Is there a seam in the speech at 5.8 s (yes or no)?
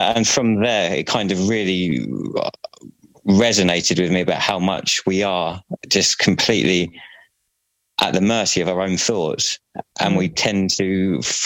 yes